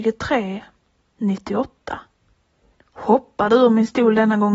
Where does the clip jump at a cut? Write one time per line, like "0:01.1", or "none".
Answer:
0:02.7